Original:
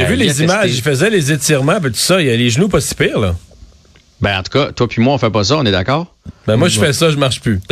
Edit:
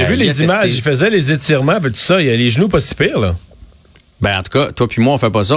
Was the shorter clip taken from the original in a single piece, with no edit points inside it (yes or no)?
yes